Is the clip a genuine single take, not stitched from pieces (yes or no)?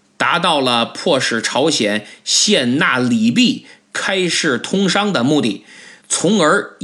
yes